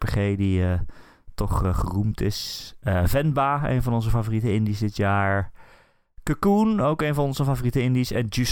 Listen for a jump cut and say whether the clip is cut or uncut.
uncut